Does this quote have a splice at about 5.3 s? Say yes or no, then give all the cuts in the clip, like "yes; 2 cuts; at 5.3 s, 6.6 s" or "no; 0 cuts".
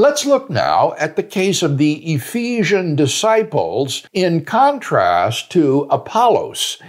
no; 1 cut; at 4.1 s